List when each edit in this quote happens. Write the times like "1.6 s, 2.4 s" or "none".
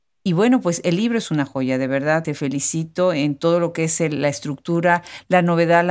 none